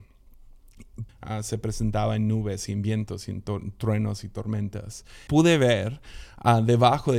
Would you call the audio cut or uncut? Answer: cut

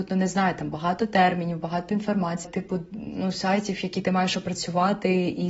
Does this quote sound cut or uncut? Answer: cut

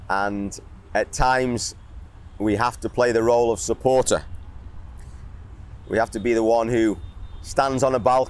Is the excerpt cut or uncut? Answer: uncut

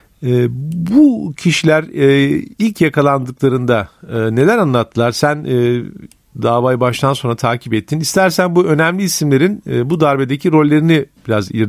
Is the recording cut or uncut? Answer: uncut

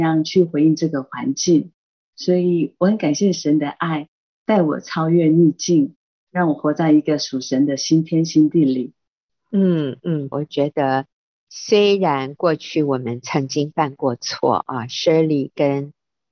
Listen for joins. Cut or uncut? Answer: cut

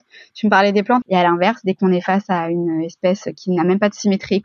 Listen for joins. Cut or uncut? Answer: cut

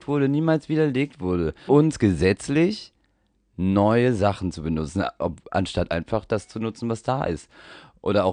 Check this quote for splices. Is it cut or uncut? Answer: cut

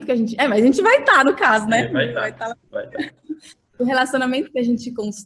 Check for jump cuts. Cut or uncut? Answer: uncut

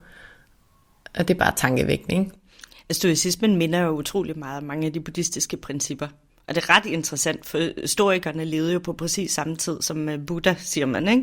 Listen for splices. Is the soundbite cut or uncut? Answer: uncut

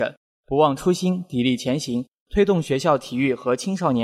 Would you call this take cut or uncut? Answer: uncut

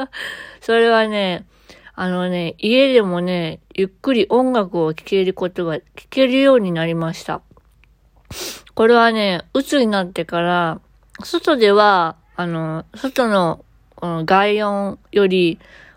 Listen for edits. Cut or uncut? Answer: uncut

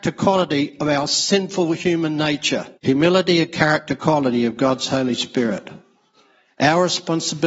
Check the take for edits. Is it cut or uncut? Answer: cut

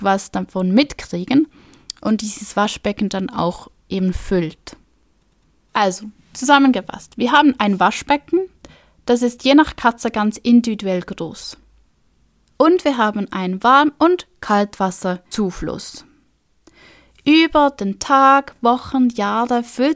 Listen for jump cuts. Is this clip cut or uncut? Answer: uncut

